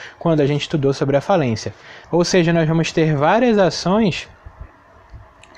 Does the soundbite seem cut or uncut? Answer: cut